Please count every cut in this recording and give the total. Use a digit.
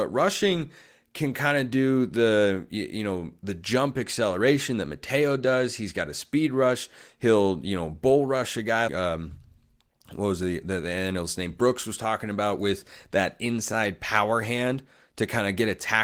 1